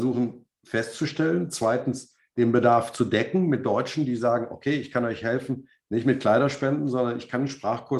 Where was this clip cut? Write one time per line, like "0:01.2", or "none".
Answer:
none